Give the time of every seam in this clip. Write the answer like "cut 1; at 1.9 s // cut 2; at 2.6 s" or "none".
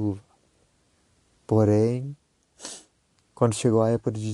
none